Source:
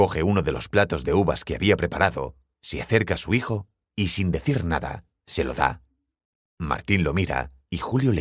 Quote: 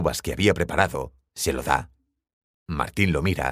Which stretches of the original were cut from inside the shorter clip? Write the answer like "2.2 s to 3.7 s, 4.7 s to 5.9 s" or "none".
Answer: 2.5 s to 5.2 s